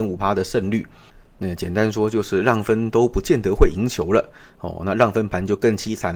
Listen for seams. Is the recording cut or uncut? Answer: uncut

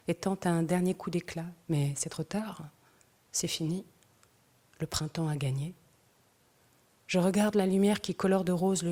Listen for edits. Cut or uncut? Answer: uncut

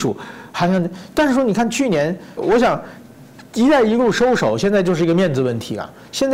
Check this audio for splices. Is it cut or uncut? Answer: cut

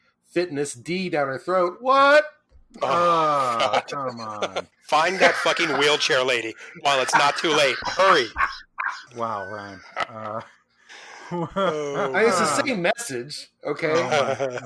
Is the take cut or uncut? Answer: cut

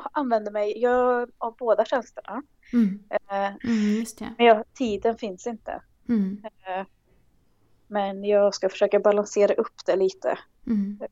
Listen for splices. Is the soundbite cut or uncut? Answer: cut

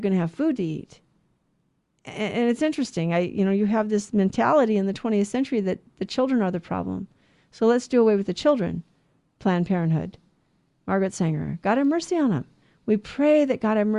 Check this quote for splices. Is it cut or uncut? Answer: uncut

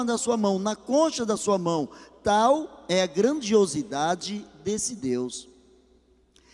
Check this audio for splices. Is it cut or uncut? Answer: uncut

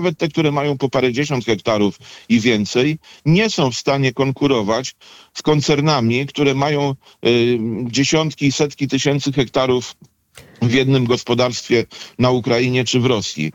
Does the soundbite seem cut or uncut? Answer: uncut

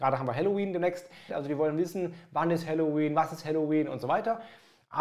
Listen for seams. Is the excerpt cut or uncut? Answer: cut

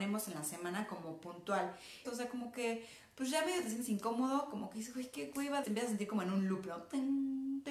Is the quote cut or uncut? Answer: cut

